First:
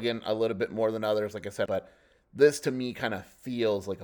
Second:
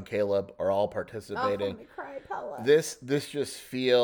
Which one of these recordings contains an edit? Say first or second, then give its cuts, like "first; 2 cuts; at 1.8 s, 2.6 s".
first; 1 cut; at 1.7 s